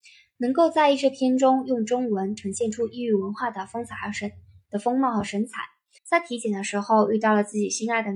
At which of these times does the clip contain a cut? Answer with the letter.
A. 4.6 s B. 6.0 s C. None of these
B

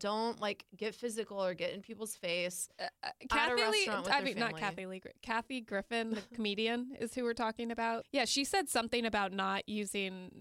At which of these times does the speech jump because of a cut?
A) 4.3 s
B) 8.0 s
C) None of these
B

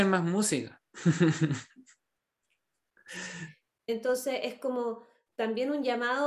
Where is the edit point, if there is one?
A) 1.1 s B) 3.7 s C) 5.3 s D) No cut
B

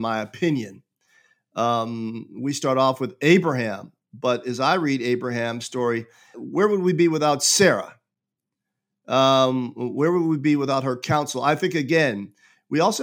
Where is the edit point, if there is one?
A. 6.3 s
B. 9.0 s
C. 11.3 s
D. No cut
A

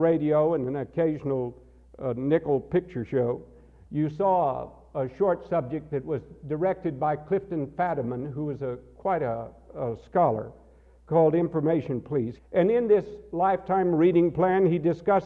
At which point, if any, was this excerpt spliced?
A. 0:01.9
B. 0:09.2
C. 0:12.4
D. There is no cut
C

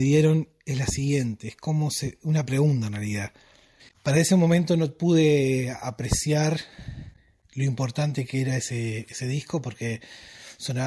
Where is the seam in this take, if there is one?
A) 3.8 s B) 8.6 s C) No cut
A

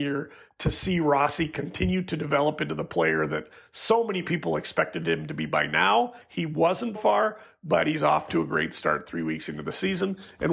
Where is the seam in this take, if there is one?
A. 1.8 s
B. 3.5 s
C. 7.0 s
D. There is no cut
C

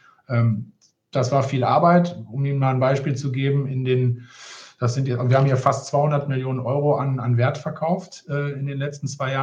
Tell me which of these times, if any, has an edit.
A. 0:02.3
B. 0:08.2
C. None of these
C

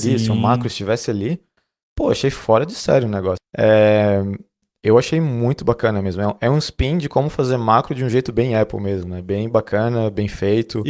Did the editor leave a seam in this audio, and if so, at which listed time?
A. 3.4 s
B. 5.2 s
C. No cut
A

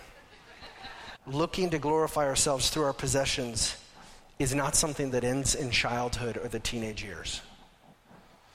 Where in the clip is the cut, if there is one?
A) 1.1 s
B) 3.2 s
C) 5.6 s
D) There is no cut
A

